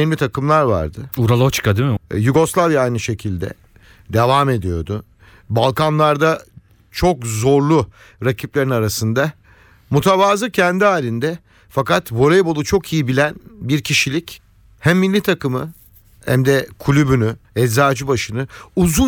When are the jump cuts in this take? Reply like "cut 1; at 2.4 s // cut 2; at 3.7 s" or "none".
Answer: cut 1; at 2.0 s // cut 2; at 17.4 s